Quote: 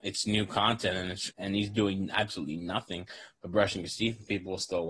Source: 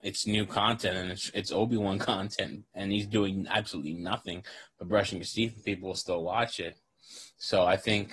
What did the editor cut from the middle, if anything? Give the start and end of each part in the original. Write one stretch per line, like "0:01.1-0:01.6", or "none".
0:01.3-0:02.7